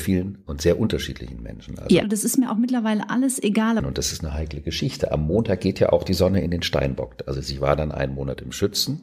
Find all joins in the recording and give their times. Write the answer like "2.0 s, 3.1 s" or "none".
2.0 s, 3.8 s